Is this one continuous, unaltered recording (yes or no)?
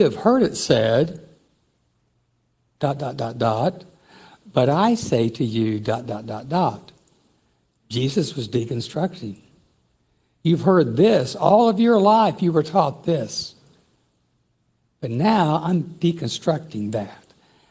yes